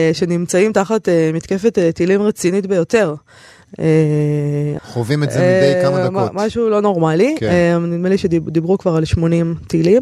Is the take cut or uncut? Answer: cut